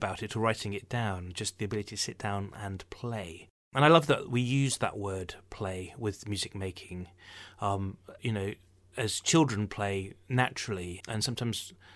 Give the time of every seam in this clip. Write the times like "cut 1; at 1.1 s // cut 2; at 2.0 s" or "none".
cut 1; at 8.2 s // cut 2; at 11.0 s